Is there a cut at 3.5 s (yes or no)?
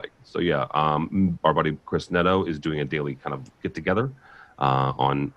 yes